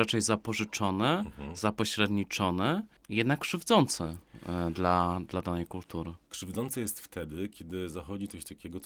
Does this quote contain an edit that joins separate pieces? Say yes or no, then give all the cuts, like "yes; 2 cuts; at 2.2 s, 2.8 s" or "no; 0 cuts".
yes; 1 cut; at 6.2 s